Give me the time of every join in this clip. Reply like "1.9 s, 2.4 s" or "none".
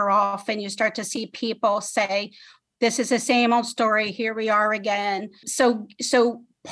5.4 s